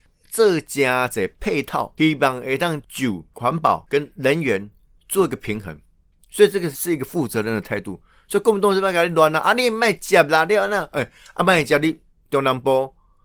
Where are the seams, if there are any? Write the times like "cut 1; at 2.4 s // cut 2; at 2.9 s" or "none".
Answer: cut 1; at 6.7 s